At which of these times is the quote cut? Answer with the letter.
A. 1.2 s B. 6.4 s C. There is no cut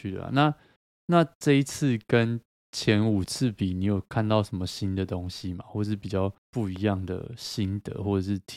B